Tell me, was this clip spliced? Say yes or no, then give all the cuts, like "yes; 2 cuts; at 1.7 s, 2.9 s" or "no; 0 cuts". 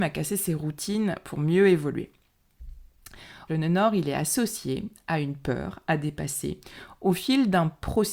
yes; 1 cut; at 3.5 s